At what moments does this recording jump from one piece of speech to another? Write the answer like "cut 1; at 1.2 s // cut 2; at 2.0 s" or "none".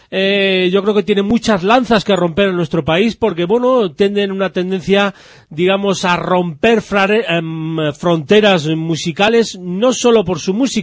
none